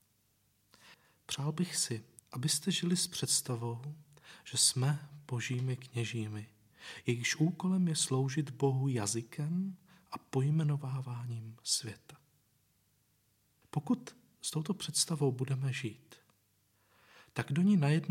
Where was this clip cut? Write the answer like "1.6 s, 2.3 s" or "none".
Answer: none

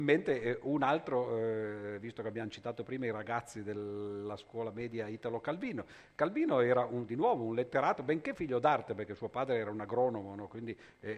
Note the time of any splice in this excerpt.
none

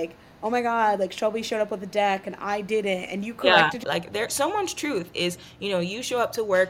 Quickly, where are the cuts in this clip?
3.8 s

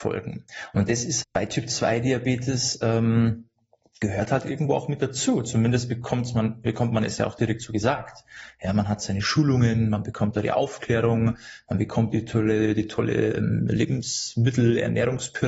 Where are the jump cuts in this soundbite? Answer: 1.2 s

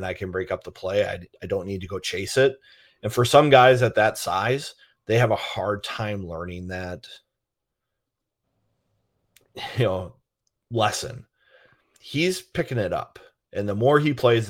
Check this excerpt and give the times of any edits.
none

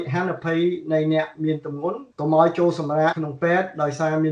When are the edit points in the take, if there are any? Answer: 2.1 s, 3.1 s

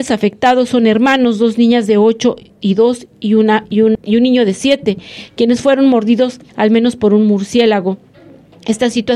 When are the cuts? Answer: 3.9 s, 6.5 s

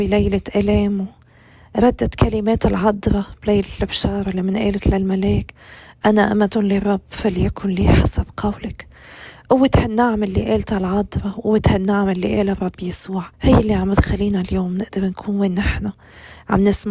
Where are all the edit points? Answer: 13.3 s

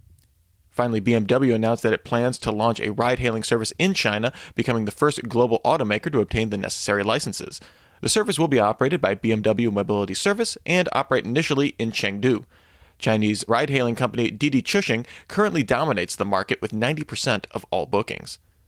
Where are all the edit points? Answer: 13.5 s

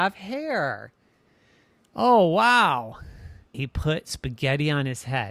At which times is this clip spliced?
3.5 s

